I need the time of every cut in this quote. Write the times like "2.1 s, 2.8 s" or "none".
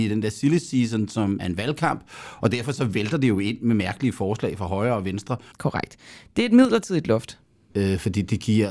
1.4 s, 5.5 s, 7.7 s